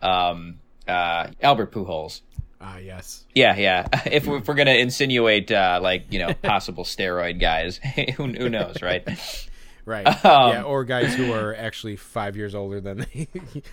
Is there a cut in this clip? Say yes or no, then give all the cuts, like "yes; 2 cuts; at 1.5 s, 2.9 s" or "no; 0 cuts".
yes; 2 cuts; at 1.3 s, 3.3 s